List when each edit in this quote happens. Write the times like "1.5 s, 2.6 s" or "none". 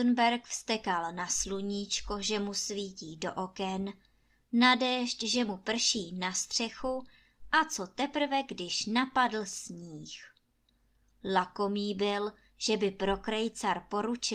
none